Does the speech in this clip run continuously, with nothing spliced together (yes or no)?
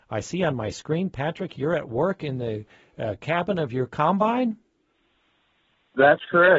yes